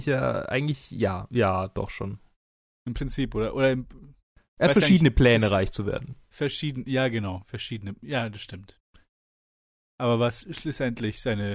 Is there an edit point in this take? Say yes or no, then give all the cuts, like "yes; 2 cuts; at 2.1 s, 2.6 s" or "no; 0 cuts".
no; 0 cuts